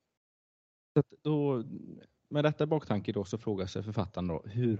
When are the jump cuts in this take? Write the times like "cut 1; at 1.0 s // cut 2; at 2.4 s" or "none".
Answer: cut 1; at 1.2 s